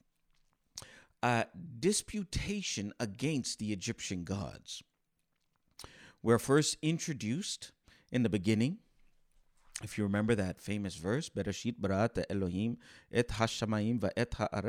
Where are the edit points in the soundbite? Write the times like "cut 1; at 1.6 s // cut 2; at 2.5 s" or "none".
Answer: none